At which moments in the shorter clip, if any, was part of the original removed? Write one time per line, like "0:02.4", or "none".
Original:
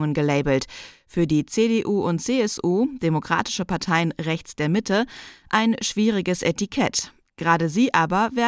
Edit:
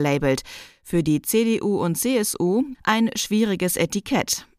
0:02.7